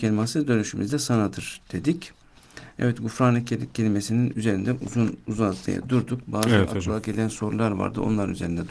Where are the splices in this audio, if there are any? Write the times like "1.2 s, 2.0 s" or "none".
none